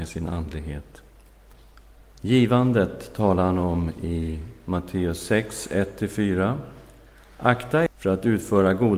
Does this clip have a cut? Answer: yes; 1 cut; at 7.9 s

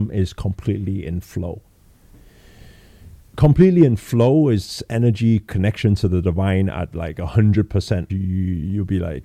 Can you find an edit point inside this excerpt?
yes; 1 cut; at 8.1 s

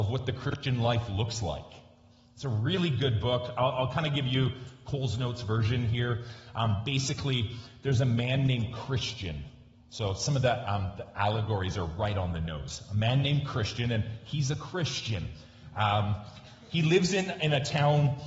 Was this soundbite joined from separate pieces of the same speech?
no; 0 cuts

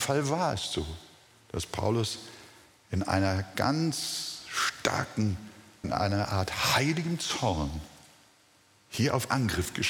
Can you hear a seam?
yes; 1 cut; at 5.8 s

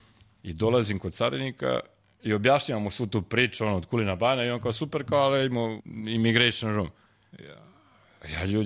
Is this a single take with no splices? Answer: no; 1 cut; at 5.8 s

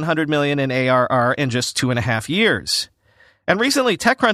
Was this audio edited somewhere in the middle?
no; 0 cuts

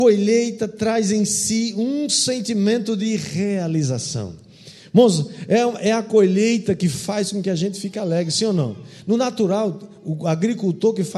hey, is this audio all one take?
yes; 0 cuts

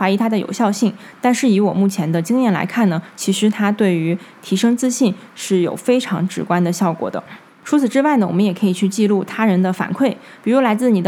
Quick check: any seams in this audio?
yes; 1 cut; at 7.5 s

